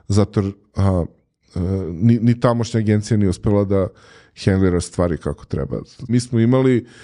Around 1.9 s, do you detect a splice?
no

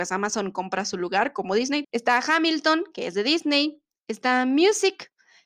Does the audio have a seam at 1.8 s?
yes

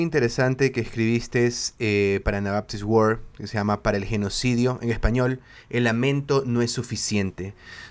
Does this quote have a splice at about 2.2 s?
no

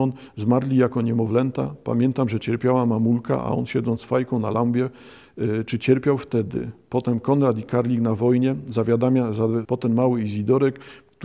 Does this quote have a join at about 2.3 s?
no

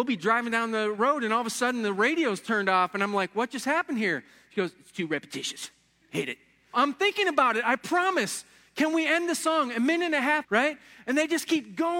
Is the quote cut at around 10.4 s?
yes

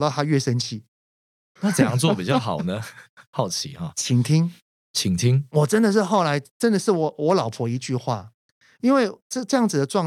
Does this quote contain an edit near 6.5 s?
no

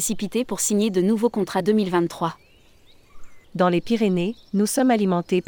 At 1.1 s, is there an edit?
no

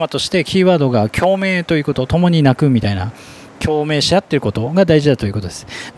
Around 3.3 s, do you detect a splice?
no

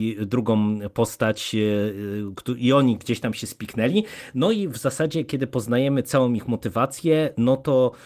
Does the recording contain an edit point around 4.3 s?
no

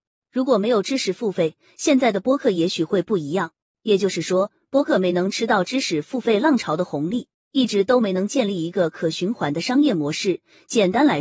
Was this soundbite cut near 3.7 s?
no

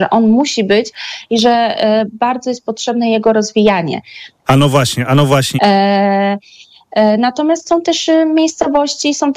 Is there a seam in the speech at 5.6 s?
yes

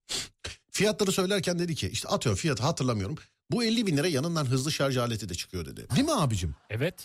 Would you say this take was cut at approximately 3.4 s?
no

